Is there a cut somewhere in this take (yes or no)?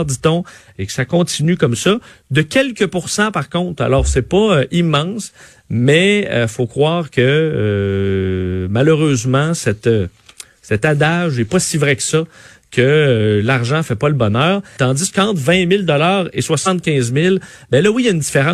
yes